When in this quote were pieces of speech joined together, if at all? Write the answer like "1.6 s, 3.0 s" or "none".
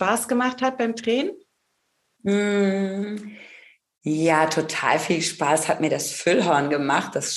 none